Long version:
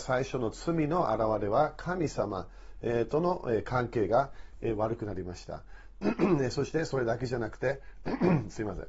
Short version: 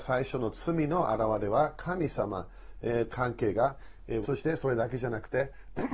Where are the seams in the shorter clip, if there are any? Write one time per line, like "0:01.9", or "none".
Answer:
0:03.1
0:04.2

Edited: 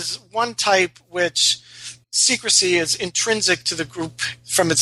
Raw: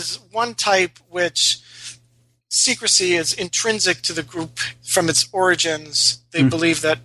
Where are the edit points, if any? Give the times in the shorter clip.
0:02.0

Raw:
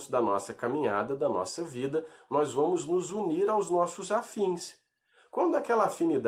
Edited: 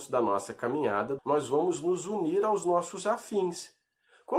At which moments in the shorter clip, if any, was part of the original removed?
0:01.2

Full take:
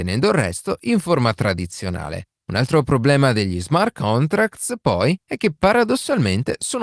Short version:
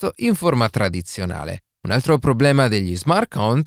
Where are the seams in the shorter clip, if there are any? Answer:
none

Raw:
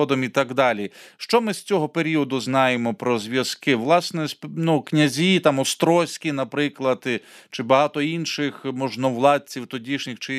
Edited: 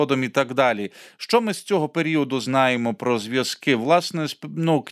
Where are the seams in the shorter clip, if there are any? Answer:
none

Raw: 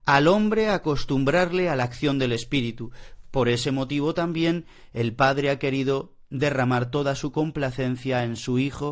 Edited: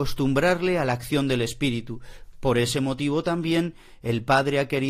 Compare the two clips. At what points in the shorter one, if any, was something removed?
none

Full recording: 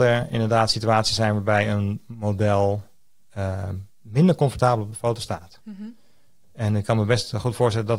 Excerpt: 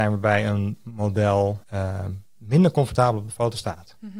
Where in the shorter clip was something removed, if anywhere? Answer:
0:01.6

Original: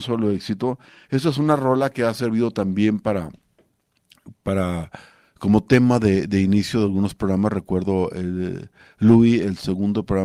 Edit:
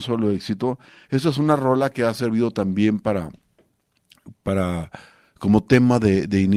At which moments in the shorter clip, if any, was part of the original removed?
none

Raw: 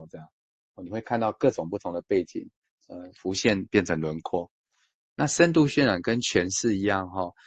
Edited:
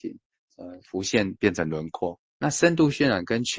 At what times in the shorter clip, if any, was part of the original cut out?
0:02.3

